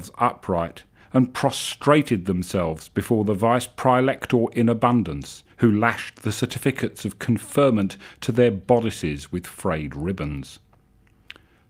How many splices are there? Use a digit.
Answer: 2